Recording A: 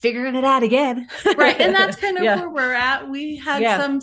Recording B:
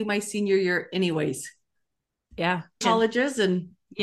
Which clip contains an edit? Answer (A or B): B